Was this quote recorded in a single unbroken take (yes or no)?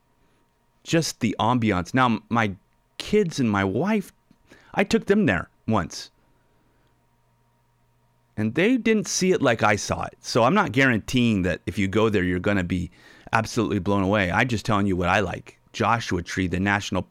yes